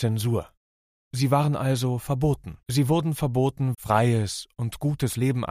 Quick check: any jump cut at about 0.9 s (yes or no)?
no